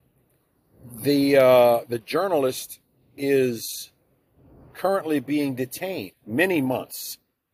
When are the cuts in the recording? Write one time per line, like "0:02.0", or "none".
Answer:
0:06.1